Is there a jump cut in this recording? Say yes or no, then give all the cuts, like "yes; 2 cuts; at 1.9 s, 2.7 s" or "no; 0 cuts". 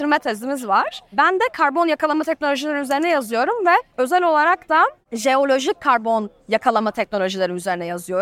no; 0 cuts